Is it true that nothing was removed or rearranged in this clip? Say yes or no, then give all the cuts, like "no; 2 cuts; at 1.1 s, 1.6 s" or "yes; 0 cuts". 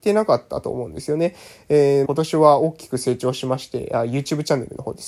no; 1 cut; at 2.1 s